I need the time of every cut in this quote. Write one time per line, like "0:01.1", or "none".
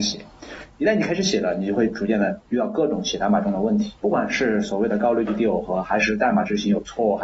0:04.0